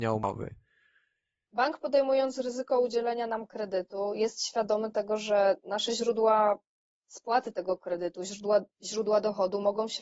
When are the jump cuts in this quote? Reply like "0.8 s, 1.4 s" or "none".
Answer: none